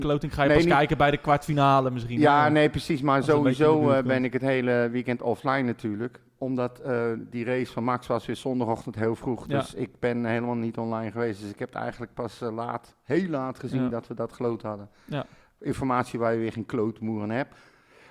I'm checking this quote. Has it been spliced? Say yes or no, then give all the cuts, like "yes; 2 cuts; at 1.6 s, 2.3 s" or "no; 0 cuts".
no; 0 cuts